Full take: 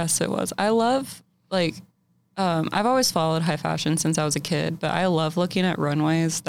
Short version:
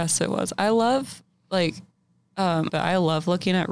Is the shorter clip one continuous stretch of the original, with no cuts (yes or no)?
no